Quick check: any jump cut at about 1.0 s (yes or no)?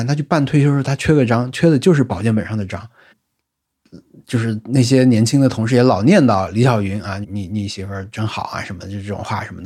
no